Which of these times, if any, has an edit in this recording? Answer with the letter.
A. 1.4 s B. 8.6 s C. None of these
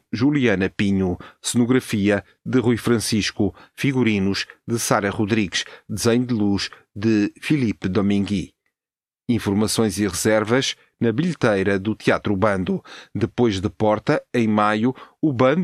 A